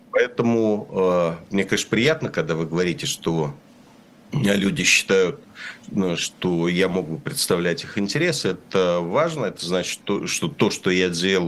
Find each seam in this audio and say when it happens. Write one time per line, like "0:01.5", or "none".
none